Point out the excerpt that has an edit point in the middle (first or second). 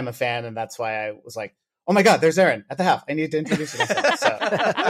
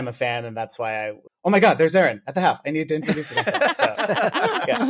second